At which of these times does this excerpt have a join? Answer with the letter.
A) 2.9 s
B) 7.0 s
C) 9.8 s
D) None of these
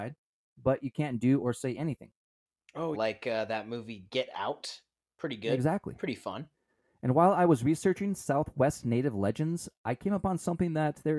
A